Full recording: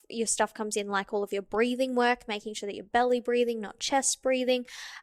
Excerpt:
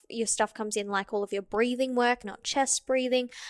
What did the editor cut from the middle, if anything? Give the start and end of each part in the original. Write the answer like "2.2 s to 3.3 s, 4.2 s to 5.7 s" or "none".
2.2 s to 3.6 s